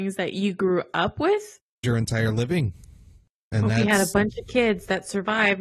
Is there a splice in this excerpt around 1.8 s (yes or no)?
yes